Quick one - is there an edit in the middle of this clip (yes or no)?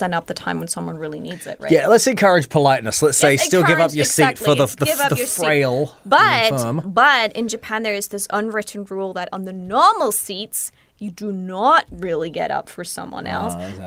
no